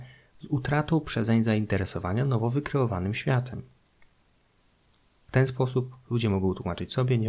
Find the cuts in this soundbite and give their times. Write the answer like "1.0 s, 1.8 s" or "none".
5.2 s